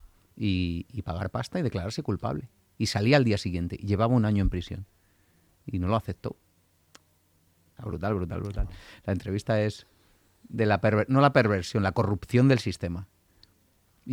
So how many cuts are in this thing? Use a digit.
1